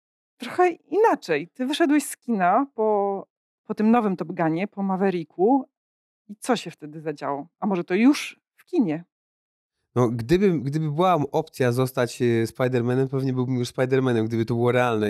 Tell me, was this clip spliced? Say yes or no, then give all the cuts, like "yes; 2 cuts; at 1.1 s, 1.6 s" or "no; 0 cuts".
no; 0 cuts